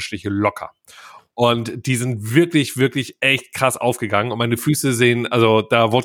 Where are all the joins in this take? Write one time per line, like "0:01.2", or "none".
none